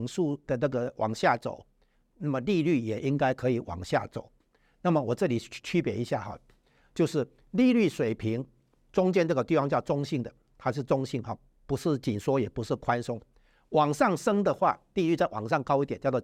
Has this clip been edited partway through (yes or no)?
no